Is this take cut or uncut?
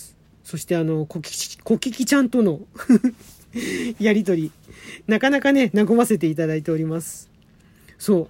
uncut